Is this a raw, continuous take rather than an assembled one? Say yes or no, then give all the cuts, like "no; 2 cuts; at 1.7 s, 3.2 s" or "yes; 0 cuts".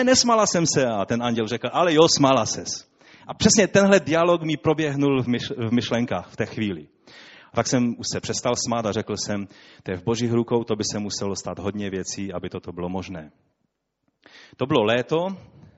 yes; 0 cuts